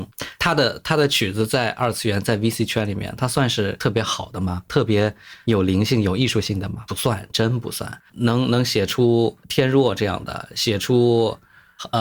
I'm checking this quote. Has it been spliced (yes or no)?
yes